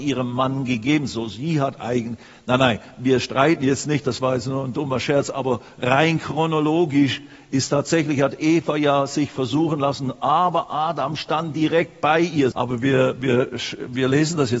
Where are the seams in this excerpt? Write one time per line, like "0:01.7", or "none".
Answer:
0:12.5